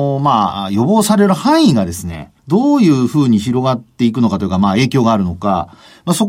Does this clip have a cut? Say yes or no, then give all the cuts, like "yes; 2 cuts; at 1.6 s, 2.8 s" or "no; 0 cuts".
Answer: yes; 1 cut; at 2.4 s